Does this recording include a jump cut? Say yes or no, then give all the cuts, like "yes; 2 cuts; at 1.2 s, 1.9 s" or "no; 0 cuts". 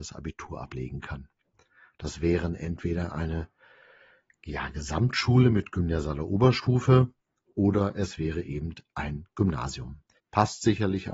yes; 1 cut; at 10.2 s